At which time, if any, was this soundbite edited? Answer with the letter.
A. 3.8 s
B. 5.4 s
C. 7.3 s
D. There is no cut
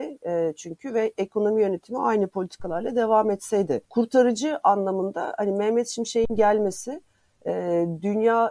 A